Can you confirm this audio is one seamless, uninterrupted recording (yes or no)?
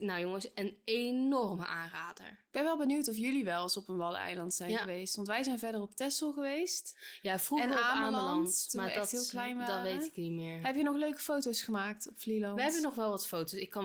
yes